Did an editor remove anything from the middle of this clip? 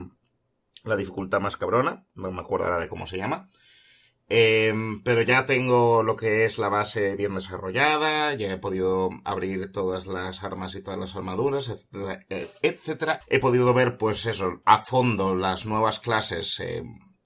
yes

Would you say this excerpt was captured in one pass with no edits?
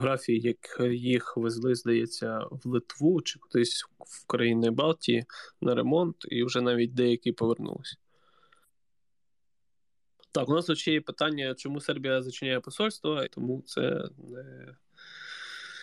no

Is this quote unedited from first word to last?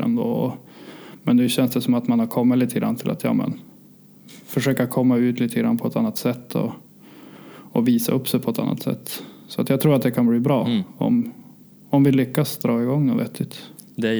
yes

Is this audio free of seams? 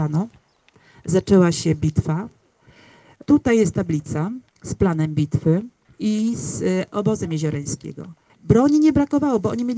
no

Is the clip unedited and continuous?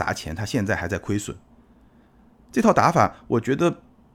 yes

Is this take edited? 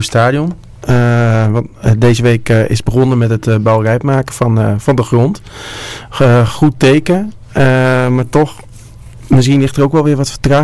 no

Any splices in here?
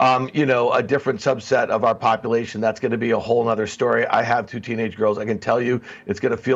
no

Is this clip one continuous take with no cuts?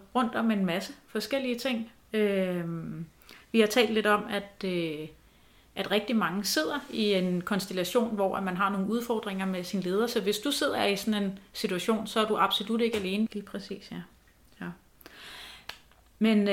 no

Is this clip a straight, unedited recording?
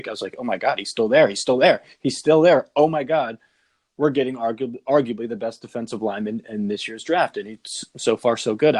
yes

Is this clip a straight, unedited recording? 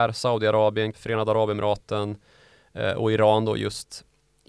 no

